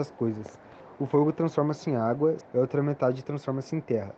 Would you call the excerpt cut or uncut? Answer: cut